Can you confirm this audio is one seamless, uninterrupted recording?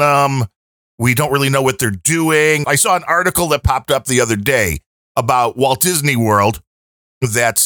no; 1 cut; at 2.6 s

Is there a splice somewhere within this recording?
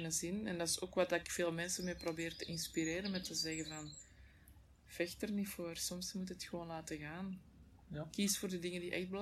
no; 0 cuts

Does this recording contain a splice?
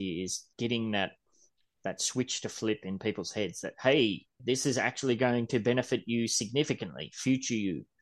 yes; 1 cut; at 4.4 s

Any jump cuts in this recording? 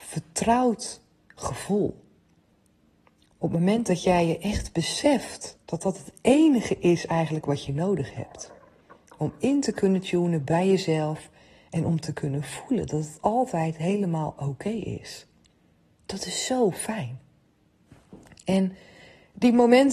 yes; 1 cut; at 5.6 s

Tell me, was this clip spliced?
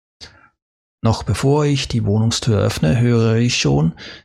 no; 0 cuts

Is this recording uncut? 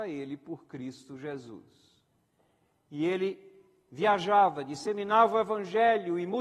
yes; 0 cuts

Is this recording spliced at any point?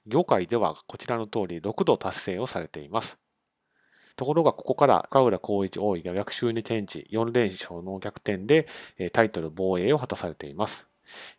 yes; 1 cut; at 4.1 s

